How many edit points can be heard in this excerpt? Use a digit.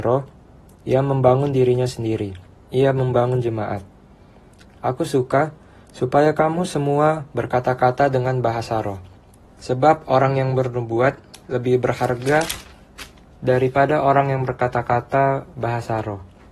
2